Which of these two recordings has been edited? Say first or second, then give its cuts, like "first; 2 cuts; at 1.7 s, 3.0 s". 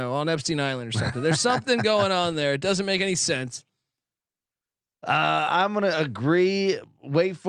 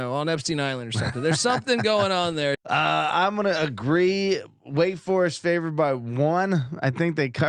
second; 1 cut; at 2.5 s